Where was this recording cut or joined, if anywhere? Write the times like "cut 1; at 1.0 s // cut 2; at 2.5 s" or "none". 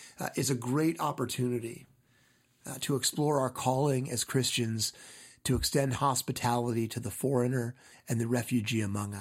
cut 1; at 7.9 s